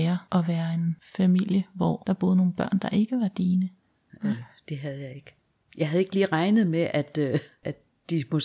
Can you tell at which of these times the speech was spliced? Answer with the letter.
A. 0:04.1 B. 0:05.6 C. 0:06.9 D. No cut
A